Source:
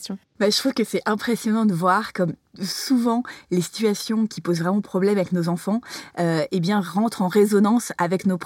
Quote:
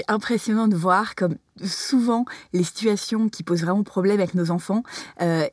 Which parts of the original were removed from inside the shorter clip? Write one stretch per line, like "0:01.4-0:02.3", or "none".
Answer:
none